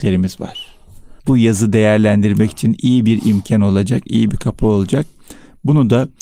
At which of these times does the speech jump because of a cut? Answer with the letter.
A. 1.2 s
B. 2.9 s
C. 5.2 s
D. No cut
A